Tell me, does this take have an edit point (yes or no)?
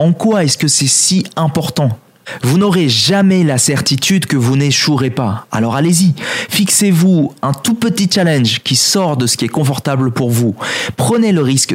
no